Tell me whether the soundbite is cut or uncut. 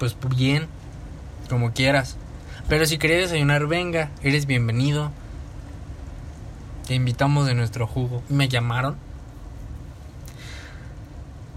cut